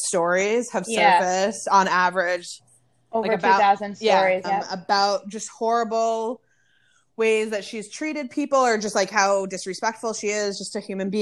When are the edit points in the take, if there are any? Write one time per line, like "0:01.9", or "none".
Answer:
0:04.4